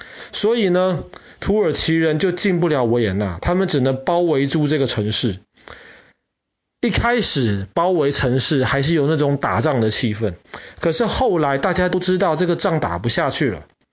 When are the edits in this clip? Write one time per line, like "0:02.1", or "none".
none